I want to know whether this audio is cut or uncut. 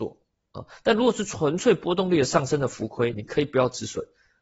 cut